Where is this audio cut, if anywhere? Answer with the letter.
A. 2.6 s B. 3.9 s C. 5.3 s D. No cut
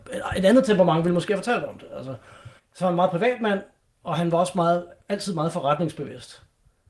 A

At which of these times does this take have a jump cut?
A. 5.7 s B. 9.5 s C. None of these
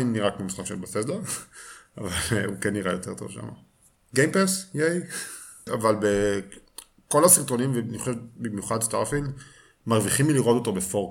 A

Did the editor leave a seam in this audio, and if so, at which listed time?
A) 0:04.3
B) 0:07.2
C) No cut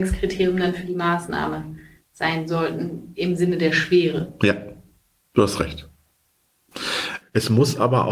B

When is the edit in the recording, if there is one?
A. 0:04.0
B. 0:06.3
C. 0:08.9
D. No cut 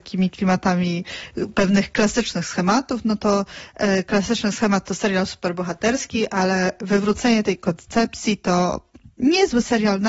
D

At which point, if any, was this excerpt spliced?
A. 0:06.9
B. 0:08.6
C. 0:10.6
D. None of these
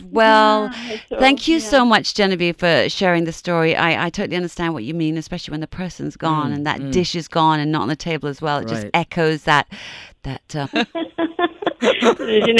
C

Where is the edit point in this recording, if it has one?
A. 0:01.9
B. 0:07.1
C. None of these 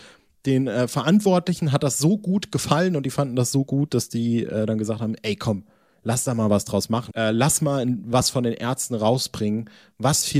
B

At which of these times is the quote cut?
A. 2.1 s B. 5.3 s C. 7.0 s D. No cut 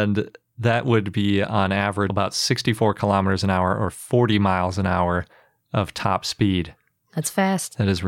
A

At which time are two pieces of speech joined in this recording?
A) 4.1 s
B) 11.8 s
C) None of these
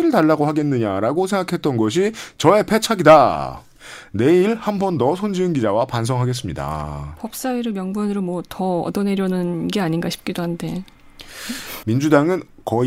B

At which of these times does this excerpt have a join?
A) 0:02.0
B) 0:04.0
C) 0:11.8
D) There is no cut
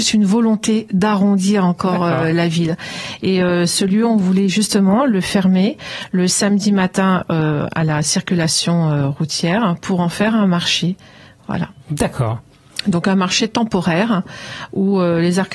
C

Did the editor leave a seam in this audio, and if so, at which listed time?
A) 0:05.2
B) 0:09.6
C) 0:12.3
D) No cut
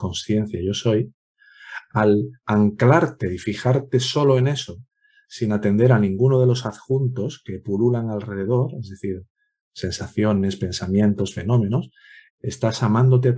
C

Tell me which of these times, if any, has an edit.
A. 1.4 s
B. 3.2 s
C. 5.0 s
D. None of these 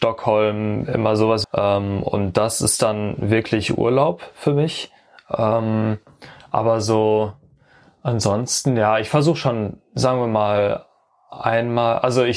A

